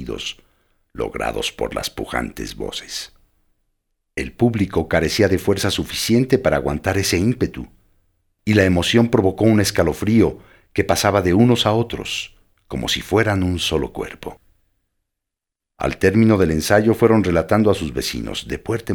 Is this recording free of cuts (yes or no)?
no